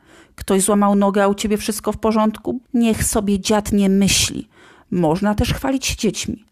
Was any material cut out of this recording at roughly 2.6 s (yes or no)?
yes